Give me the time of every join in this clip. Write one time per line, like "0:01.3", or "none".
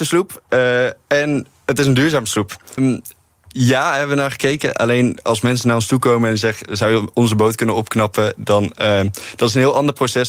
0:02.8